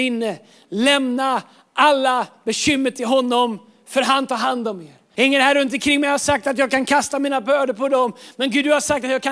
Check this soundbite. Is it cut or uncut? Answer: cut